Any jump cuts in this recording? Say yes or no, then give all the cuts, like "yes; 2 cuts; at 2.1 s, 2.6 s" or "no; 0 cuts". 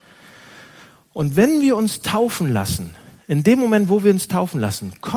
no; 0 cuts